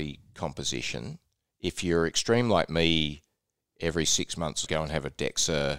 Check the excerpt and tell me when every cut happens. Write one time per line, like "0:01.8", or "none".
0:04.6